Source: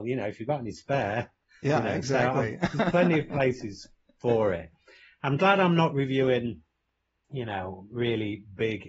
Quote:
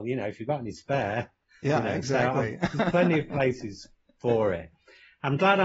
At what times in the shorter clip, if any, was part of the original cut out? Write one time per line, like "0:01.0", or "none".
none